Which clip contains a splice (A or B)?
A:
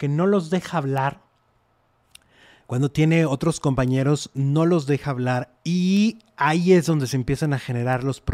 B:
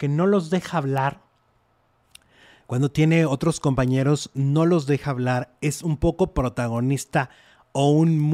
A